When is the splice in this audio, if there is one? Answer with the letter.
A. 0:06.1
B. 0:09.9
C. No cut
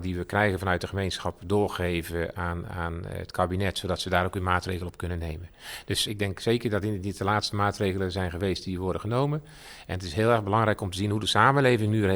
A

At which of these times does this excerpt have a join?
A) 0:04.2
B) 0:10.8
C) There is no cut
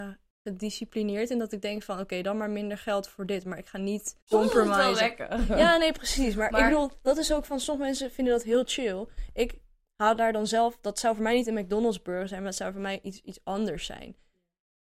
A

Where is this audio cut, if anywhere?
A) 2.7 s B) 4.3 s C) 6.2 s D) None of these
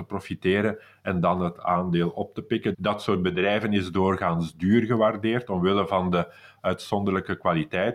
A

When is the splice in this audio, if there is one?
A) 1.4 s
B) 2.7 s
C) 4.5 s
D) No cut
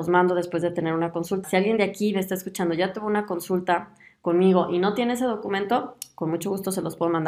A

